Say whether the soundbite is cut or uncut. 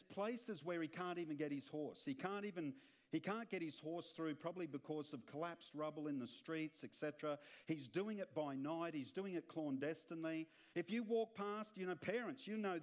cut